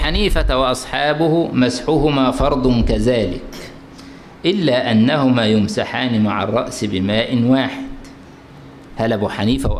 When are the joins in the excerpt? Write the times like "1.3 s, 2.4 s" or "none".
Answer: 8.9 s

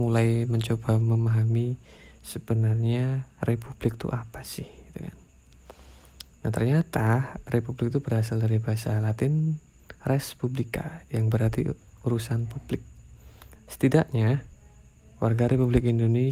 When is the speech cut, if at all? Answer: 13.5 s

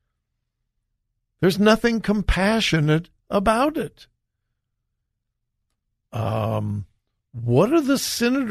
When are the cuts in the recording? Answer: 6.0 s

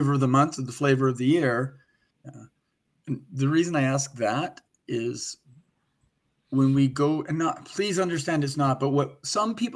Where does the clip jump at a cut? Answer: 2.1 s

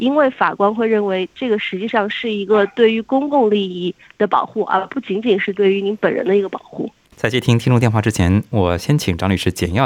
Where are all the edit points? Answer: 7.1 s

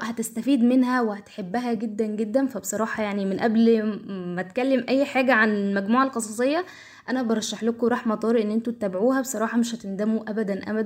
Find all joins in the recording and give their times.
none

